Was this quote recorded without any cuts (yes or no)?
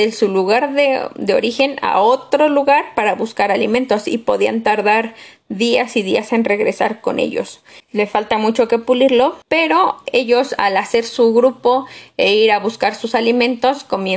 no